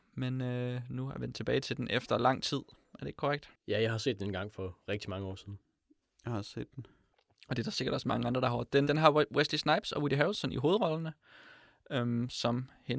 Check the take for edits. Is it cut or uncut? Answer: cut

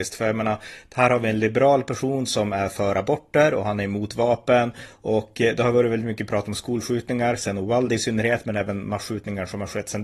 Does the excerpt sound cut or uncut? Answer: uncut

